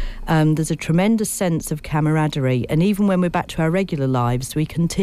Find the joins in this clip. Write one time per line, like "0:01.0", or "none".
none